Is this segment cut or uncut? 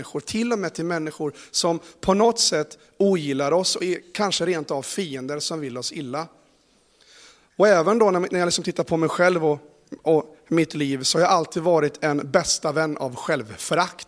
uncut